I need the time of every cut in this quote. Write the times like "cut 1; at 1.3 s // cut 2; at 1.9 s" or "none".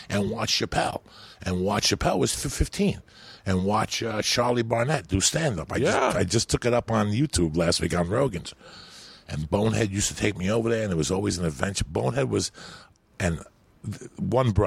cut 1; at 13.1 s